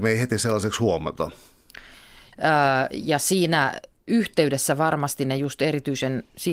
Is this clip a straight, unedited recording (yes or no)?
no